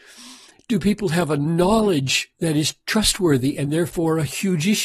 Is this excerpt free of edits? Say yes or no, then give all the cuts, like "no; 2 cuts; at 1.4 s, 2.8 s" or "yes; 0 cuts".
yes; 0 cuts